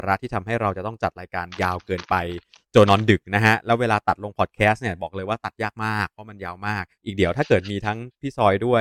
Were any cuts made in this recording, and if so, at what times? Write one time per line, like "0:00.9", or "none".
0:02.9
0:06.9